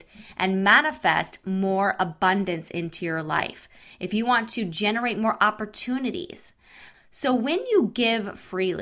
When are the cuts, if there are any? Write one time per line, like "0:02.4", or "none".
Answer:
0:06.9